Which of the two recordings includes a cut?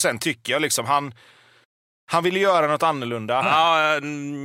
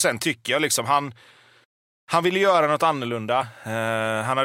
first; 1 cut; at 3.4 s

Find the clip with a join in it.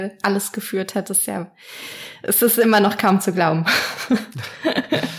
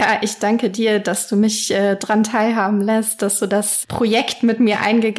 second; 1 cut; at 3.8 s

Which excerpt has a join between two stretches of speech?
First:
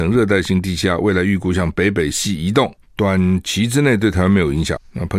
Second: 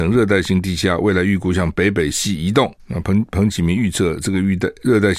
second; 1 cut; at 2.8 s

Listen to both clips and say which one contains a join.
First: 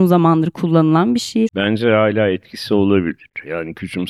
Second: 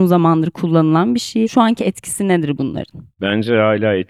first; 1 cut; at 1.5 s

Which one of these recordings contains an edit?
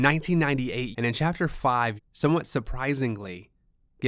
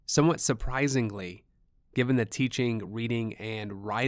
first; 2 cuts; at 0.9 s, 2.0 s

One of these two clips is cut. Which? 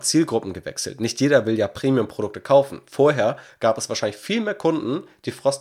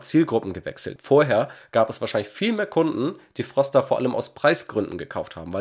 second; 1 cut; at 1.0 s

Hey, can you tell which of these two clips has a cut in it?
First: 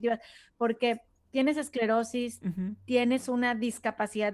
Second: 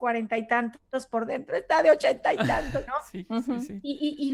second; 1 cut; at 2.9 s

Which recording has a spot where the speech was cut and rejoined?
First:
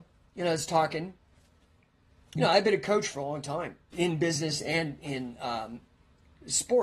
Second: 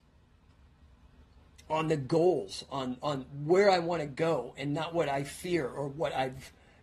first; 2 cuts; at 2.4 s, 3.9 s

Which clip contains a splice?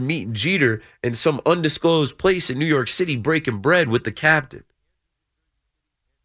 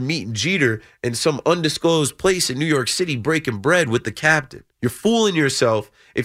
second; 1 cut; at 4.7 s

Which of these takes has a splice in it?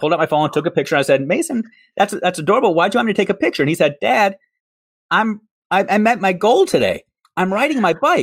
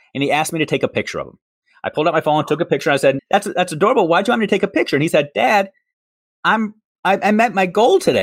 second; 1 cut; at 3.2 s

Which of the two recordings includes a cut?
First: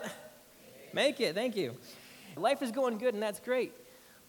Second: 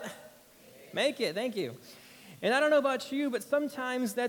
first; 1 cut; at 2.4 s

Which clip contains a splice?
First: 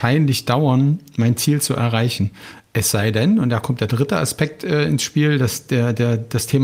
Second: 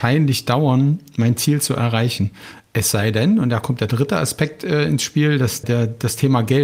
second; 1 cut; at 5.6 s

